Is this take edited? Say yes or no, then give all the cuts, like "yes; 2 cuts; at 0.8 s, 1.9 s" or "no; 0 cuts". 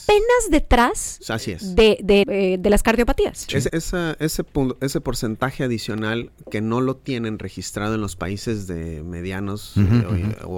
yes; 2 cuts; at 2.2 s, 3.7 s